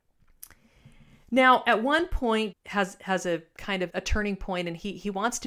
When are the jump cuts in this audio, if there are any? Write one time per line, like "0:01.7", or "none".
0:02.5
0:03.9